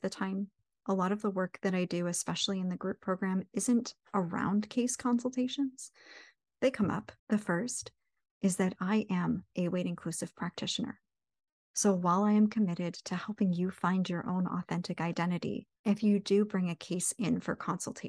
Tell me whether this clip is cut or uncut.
cut